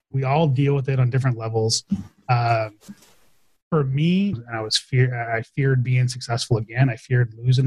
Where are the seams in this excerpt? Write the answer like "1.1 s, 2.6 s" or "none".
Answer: 4.3 s